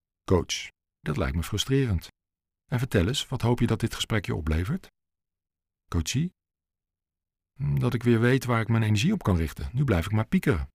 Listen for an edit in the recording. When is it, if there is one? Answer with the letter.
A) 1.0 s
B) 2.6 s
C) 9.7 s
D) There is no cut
A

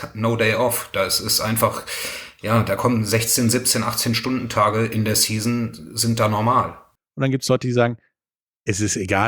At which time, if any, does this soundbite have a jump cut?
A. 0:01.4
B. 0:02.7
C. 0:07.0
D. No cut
C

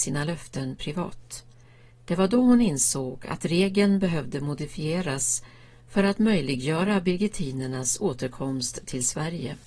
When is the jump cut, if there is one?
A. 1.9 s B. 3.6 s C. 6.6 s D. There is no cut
A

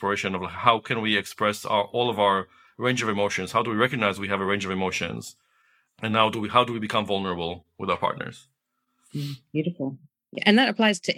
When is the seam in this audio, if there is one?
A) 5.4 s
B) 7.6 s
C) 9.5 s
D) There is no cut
D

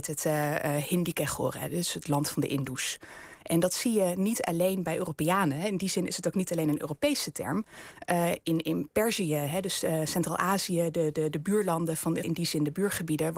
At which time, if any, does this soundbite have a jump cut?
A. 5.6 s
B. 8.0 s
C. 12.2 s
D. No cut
C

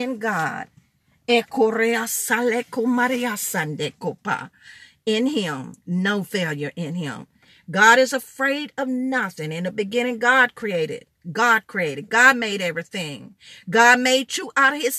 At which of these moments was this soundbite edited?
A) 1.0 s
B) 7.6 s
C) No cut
C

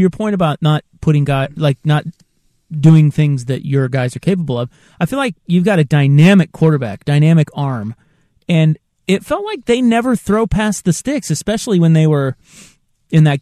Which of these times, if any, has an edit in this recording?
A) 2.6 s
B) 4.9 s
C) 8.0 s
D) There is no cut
D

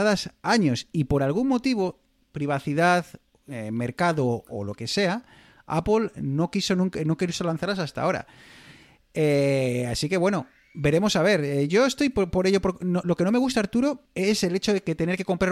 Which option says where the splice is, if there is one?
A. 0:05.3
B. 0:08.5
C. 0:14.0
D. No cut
C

